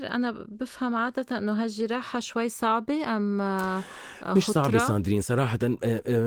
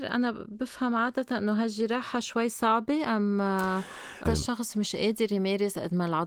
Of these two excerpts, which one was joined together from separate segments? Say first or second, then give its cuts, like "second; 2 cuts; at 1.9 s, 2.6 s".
second; 1 cut; at 4.3 s